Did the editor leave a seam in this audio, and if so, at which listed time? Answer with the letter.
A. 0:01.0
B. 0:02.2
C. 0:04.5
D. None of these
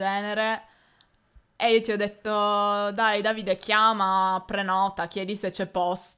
D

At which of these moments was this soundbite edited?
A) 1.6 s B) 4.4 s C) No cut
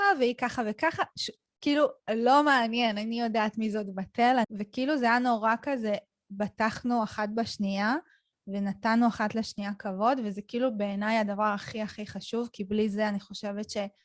B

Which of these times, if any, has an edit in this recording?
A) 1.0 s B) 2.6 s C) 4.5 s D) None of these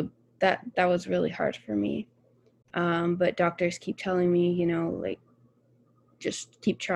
B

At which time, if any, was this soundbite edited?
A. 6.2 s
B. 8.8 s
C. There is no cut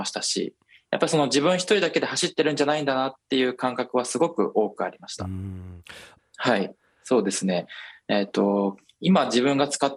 A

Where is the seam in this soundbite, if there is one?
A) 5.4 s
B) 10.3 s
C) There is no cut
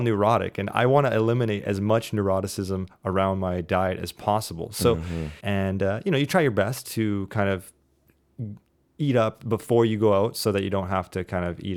A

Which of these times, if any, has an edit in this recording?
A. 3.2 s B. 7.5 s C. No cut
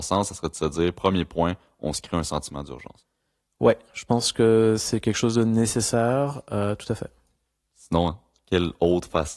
C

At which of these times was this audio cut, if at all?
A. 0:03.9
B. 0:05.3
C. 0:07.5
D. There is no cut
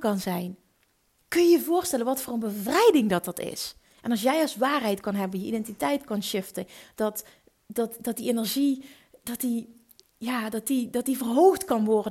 A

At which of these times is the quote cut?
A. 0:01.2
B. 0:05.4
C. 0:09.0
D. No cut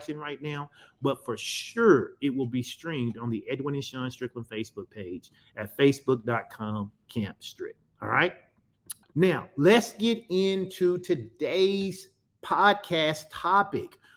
C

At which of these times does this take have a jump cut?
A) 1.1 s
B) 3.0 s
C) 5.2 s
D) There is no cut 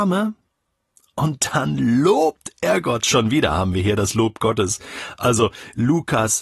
D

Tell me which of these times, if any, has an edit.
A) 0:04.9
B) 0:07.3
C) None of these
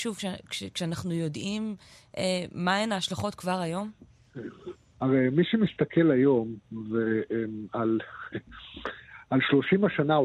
A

